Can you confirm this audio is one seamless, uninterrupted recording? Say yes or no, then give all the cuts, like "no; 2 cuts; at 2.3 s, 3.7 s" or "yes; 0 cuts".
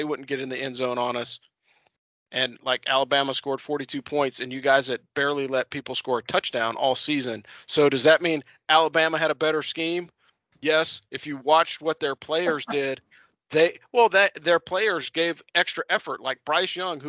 yes; 0 cuts